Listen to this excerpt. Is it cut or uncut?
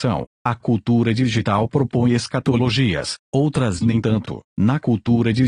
cut